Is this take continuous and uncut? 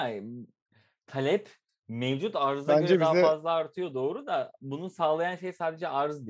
yes; 0 cuts

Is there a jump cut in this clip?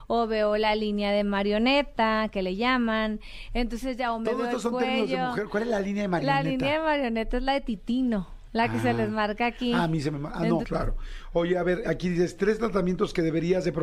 yes; 2 cuts; at 10.6 s, 11.8 s

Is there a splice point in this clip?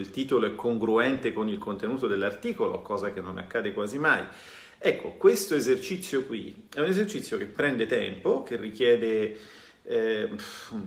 no; 0 cuts

